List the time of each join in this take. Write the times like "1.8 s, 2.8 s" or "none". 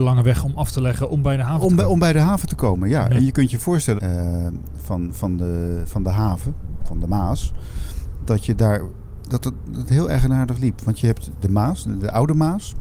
4.0 s